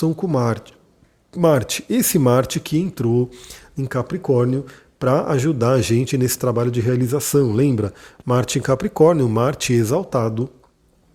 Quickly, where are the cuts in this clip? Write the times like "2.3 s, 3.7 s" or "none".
none